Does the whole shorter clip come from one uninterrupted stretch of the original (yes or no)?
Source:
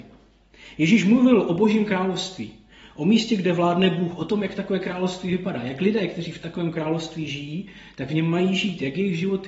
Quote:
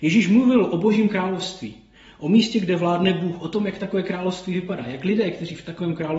yes